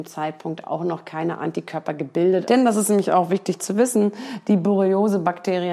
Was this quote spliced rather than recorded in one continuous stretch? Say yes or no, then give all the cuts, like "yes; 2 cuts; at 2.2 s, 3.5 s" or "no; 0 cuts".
yes; 1 cut; at 2.4 s